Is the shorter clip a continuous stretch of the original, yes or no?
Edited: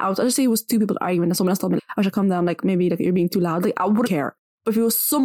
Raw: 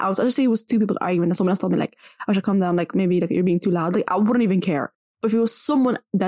no